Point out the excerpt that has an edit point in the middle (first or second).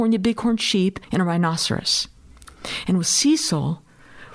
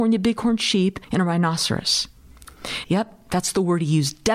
second